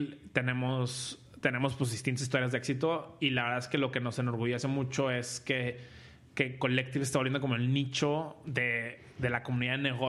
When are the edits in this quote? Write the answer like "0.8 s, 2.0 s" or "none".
none